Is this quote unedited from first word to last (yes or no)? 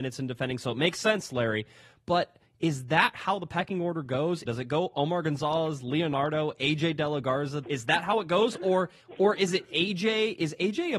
no